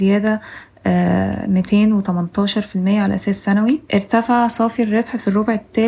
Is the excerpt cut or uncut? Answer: cut